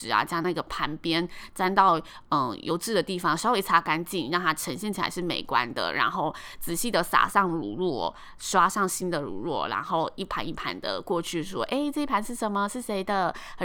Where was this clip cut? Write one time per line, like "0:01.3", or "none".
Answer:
none